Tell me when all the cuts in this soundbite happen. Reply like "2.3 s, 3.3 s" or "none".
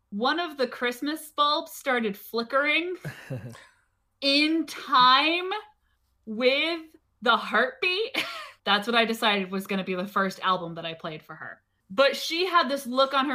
8.6 s, 11.8 s